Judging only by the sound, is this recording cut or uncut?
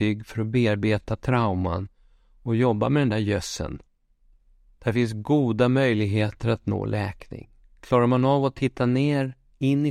uncut